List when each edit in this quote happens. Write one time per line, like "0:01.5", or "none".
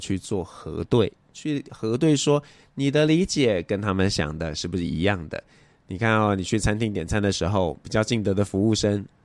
none